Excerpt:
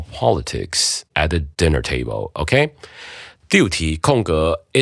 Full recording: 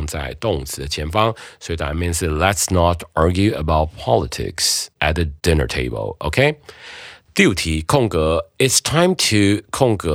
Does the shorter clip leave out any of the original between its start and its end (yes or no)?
no